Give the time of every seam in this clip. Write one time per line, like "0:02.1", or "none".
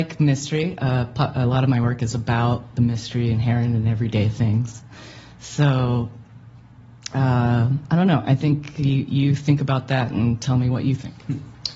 none